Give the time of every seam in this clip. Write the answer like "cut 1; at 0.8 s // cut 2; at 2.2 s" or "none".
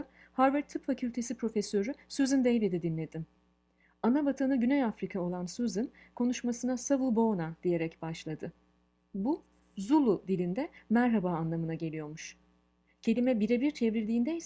none